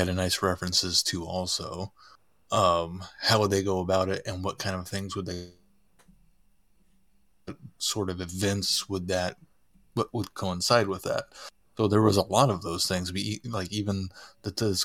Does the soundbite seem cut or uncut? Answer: uncut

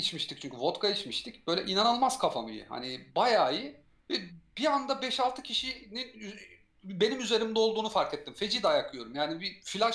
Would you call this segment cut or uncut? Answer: uncut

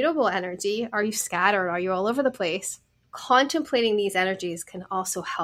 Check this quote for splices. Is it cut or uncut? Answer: cut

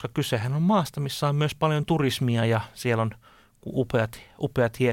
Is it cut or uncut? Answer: uncut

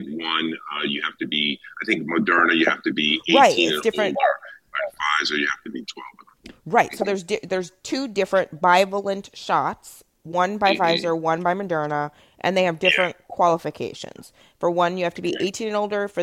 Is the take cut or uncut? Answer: uncut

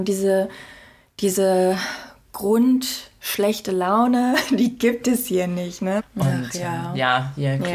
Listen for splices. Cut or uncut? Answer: cut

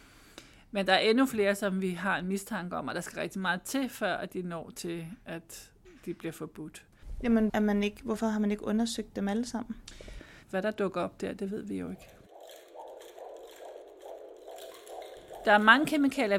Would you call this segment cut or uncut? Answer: cut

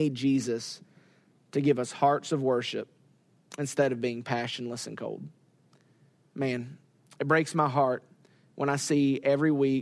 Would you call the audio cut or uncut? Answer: uncut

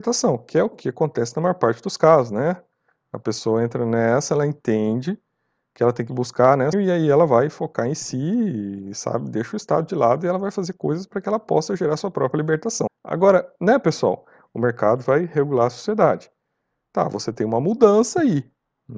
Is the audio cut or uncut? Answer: cut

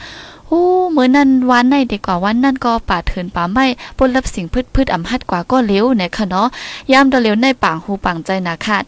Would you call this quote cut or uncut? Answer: cut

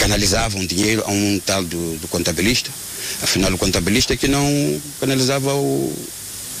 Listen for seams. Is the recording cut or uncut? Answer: uncut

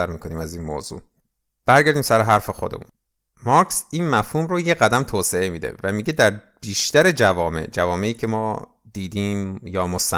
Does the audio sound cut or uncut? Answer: uncut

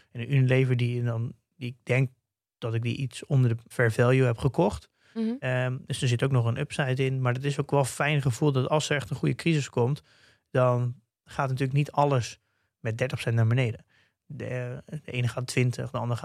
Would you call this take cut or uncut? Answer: uncut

